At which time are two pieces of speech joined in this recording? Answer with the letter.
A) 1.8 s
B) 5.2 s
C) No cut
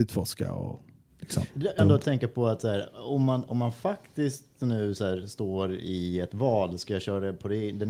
A